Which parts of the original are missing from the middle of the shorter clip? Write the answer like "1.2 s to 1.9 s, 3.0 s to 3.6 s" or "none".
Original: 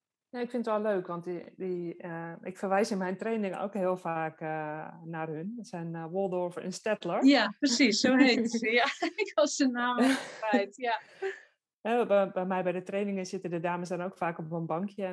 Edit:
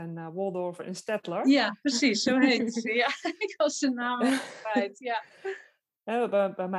none